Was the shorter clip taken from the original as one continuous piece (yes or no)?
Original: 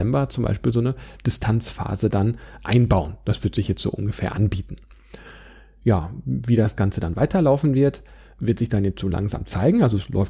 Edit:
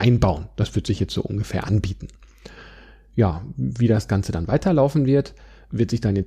yes